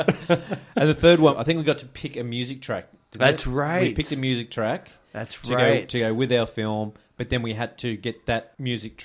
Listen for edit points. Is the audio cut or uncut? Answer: uncut